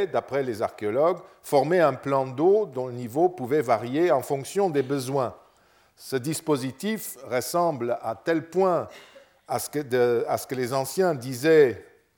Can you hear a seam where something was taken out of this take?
no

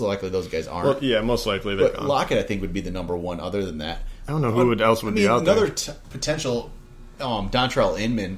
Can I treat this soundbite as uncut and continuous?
no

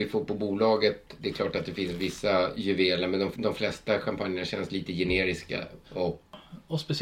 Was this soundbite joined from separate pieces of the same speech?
yes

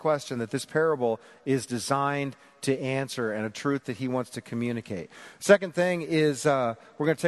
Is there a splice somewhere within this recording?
no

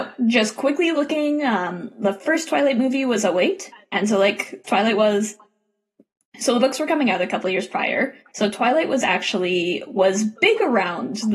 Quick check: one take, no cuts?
no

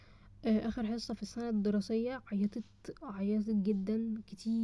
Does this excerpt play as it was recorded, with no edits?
yes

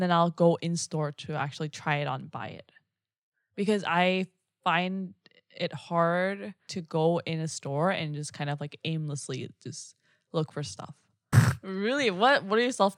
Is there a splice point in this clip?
yes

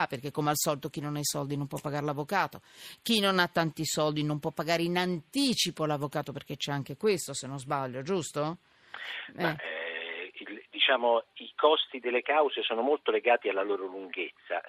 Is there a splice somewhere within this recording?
no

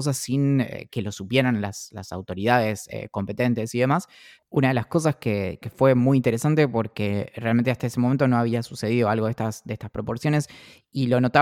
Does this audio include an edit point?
yes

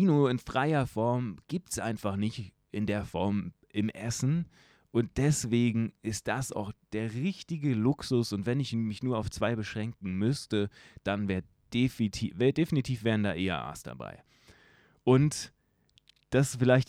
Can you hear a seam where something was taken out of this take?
no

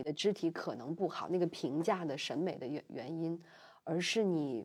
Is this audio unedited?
yes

